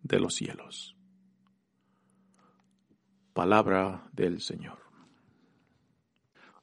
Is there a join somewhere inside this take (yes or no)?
no